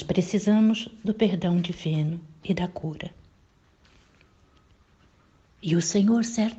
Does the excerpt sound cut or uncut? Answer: uncut